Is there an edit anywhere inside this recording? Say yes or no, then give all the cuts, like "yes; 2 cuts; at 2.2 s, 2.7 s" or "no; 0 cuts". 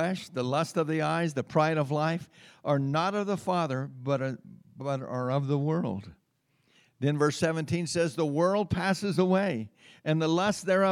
no; 0 cuts